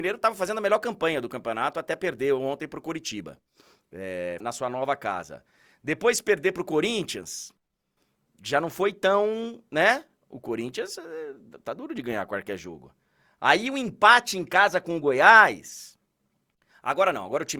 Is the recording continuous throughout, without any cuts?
no; 1 cut; at 4.4 s

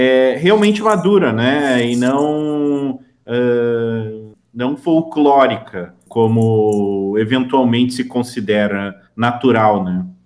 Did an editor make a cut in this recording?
no; 0 cuts

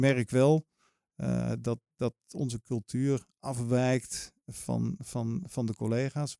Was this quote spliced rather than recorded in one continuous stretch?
no; 0 cuts

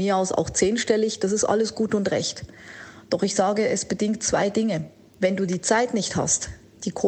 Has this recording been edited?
no; 0 cuts

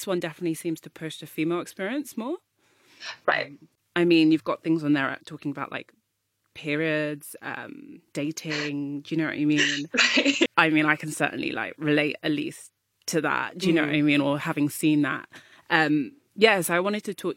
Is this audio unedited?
no; 1 cut; at 10.5 s

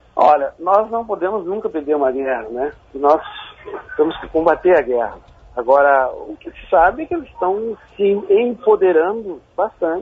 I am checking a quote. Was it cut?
no; 0 cuts

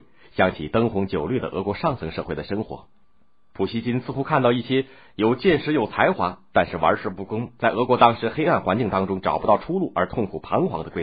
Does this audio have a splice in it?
no; 0 cuts

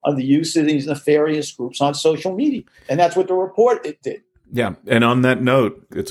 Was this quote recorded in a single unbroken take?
yes; 0 cuts

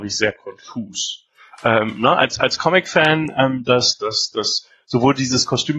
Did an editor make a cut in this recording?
no; 0 cuts

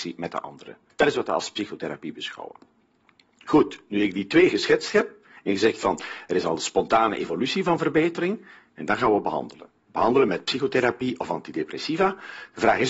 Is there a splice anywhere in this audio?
no; 0 cuts

